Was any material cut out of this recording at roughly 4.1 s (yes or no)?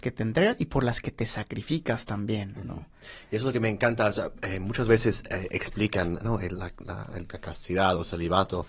no